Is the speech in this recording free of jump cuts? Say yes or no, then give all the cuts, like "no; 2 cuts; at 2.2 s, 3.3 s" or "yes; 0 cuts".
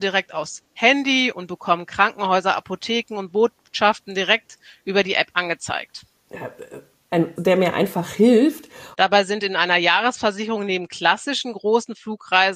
no; 2 cuts; at 7.4 s, 8.9 s